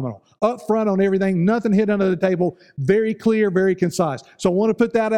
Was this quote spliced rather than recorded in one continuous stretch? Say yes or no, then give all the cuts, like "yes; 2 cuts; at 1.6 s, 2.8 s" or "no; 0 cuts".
no; 0 cuts